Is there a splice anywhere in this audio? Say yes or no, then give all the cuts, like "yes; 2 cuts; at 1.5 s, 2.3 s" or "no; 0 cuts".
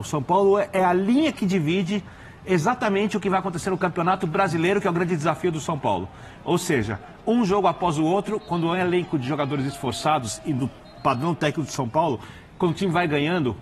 yes; 1 cut; at 6.4 s